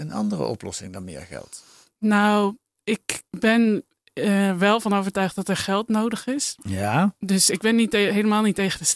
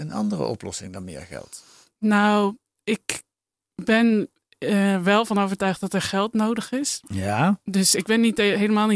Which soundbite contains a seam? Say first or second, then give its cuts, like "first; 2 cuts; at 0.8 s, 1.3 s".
first; 1 cut; at 3.3 s